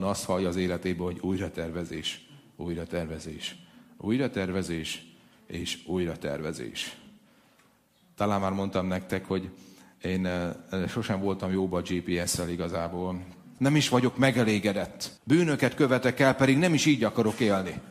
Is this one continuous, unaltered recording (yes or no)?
no